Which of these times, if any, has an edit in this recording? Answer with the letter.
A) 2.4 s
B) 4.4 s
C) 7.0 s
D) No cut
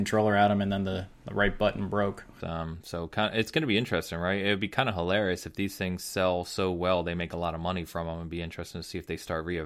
A